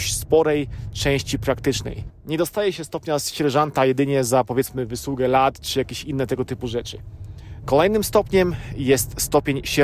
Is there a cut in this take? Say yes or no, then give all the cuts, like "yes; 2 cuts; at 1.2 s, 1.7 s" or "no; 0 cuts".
yes; 2 cuts; at 2.1 s, 7.6 s